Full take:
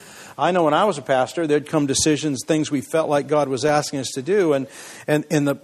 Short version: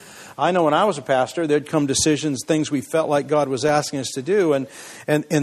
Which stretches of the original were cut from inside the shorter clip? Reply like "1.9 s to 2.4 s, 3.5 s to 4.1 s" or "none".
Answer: none